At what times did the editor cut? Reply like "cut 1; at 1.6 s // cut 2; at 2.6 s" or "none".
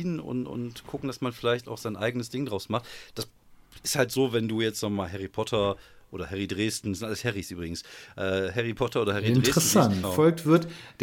cut 1; at 10.0 s